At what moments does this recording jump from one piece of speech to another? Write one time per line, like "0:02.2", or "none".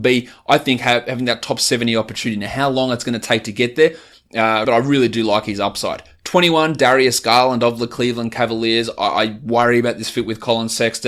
0:04.6